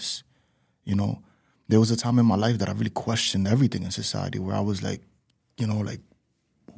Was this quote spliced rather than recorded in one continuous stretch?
no; 0 cuts

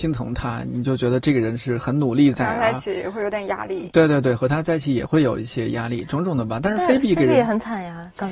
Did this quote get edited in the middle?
no; 0 cuts

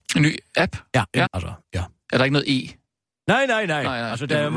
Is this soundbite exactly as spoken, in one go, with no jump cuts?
no; 1 cut; at 1.3 s

